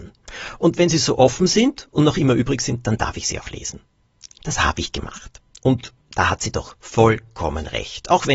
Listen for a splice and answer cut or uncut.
cut